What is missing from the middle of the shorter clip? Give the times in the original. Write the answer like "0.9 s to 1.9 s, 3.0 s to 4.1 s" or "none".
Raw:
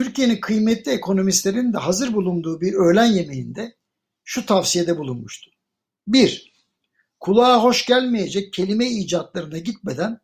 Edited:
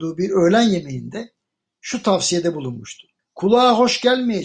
5.6 s to 7.0 s